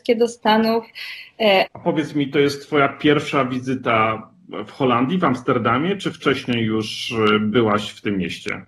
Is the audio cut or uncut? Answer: cut